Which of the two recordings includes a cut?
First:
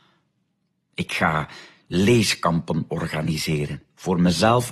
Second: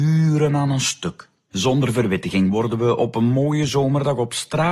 second; 1 cut; at 1.5 s

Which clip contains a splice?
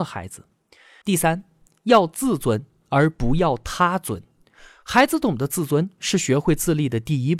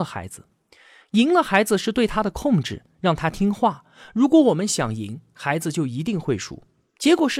first; 1 cut; at 1.0 s

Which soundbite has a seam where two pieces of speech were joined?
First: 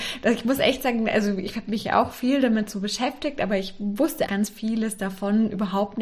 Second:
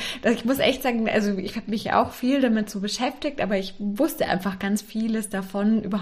first; 1 cut; at 4.3 s

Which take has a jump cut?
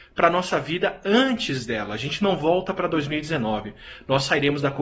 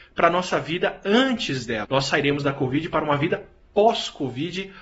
second; 1 cut; at 1.8 s

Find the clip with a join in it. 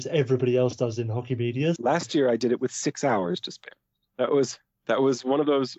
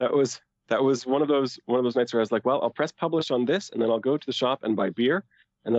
first; 2 cuts; at 1.8 s, 4.1 s

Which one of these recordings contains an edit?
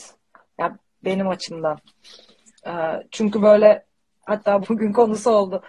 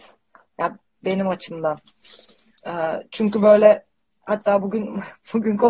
first; 1 cut; at 4.6 s

